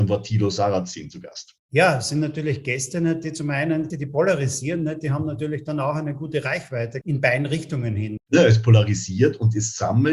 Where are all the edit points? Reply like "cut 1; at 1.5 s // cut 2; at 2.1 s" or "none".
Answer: cut 1; at 3.9 s // cut 2; at 7.0 s // cut 3; at 8.2 s